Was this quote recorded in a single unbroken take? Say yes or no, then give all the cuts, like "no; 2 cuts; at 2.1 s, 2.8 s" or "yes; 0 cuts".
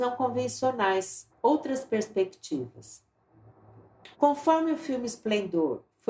no; 2 cuts; at 1.3 s, 4.1 s